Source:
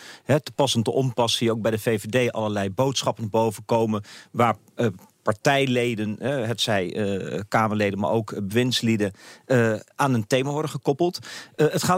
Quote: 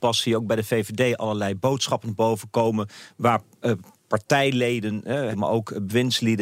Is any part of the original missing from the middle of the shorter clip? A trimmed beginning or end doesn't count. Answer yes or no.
yes